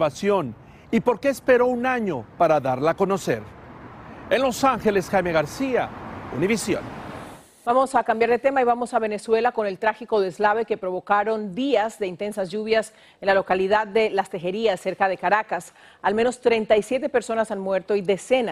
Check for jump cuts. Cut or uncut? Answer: uncut